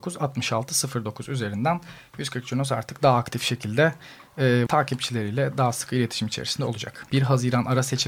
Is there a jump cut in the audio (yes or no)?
yes